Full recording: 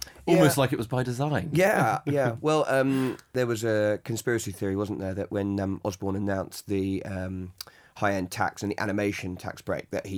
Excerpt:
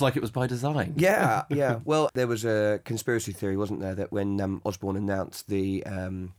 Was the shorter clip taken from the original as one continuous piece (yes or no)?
no